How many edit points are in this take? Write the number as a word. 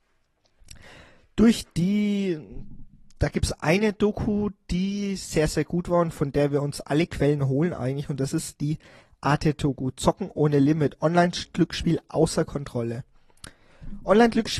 zero